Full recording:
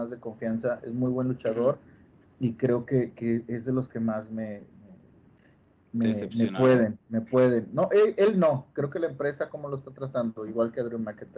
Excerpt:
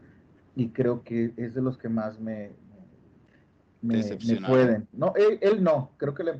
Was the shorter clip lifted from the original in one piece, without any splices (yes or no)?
no